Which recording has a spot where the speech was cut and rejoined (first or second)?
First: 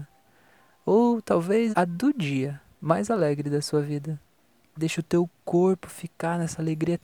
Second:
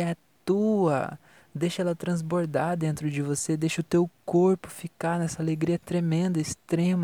first